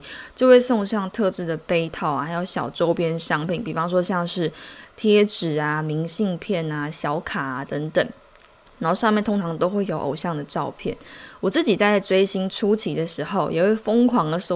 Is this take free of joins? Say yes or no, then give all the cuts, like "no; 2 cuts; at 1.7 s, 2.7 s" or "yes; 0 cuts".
yes; 0 cuts